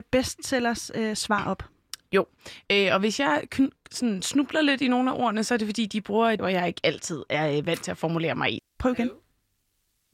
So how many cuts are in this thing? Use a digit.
2